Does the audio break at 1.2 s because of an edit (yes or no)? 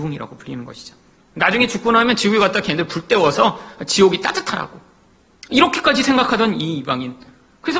yes